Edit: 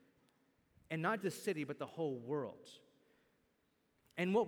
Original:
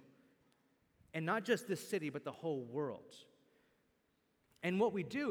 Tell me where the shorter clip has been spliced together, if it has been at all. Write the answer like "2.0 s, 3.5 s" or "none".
1.2 s